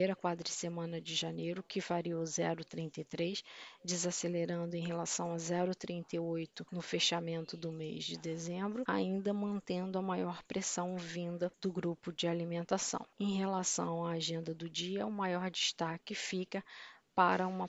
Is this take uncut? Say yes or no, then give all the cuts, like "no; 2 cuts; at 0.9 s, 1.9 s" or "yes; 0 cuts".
yes; 0 cuts